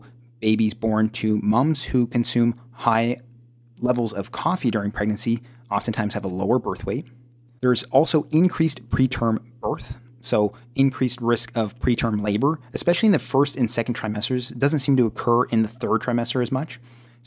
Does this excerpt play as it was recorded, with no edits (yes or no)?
yes